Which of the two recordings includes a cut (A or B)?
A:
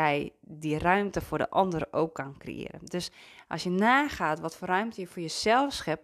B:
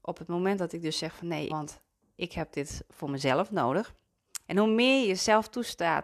B